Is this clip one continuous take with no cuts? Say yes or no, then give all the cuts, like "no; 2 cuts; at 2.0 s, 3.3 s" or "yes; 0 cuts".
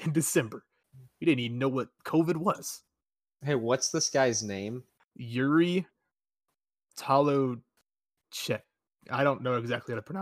yes; 0 cuts